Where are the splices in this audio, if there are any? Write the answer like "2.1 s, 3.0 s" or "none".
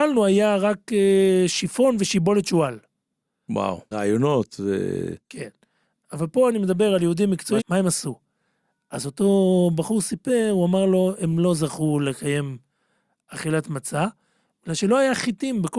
3.9 s, 7.6 s